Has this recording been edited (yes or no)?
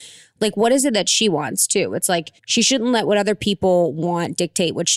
yes